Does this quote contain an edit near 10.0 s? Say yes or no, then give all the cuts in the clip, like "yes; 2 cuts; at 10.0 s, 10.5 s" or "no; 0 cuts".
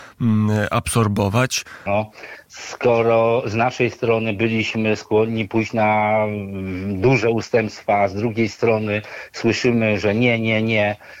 no; 1 cut; at 1.9 s